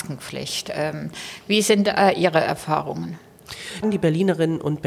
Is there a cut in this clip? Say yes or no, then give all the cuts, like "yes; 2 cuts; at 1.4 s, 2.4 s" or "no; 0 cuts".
yes; 1 cut; at 3.8 s